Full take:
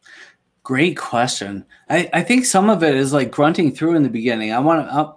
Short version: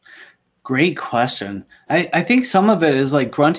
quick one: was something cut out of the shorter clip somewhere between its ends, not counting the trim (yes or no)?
no